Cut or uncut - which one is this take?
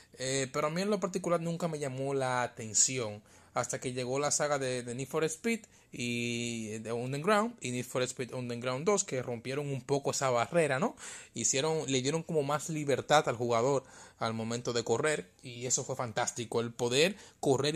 uncut